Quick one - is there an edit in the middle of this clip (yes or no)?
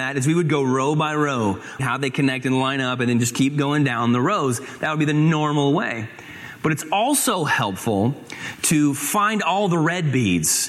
yes